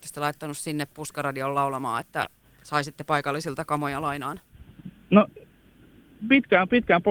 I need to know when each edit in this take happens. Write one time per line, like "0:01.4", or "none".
none